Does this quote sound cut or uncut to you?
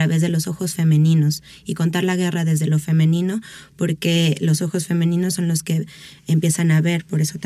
uncut